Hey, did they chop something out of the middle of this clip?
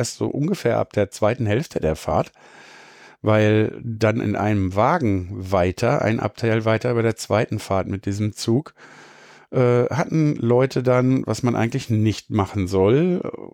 no; 0 cuts

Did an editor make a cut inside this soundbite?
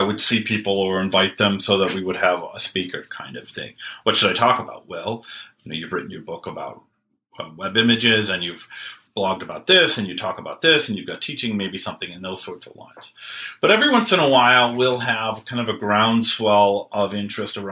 yes; 1 cut; at 3.1 s

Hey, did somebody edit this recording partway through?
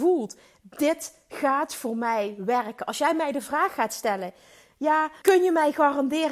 yes; 1 cut; at 5.2 s

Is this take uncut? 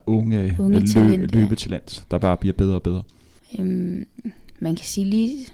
no; 1 cut; at 3.4 s

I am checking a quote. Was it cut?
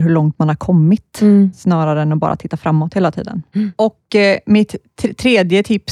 no; 0 cuts

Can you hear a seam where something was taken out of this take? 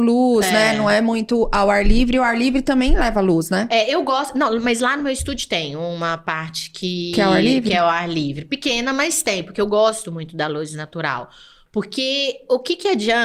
no; 0 cuts

